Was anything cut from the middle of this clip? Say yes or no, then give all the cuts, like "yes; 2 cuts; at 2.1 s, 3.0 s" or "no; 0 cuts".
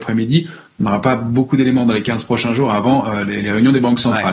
no; 0 cuts